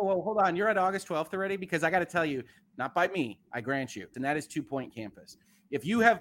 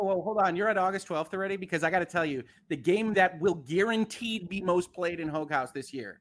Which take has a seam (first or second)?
first